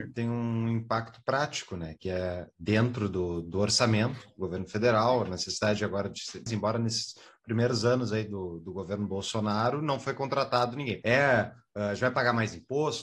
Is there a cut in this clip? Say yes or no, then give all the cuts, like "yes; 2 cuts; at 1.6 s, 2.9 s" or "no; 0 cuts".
yes; 2 cuts; at 6.5 s, 11.0 s